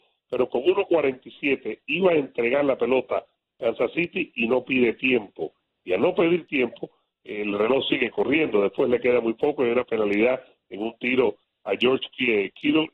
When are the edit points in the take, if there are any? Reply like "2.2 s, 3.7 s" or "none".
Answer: none